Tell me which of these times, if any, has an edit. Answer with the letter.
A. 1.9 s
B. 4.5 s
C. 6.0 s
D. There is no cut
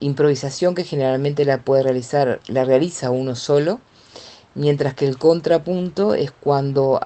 B